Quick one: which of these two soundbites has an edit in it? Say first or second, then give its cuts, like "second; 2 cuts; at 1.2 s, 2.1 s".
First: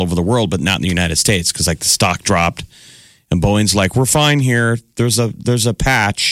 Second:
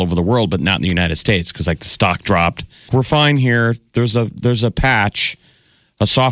second; 1 cut; at 2.9 s